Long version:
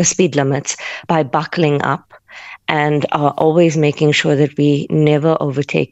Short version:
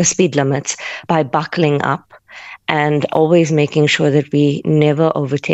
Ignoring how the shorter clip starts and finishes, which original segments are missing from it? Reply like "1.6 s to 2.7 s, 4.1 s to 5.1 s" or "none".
3.1 s to 3.3 s